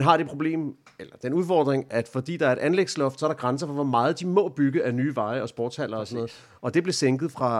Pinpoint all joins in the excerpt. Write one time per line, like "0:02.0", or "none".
none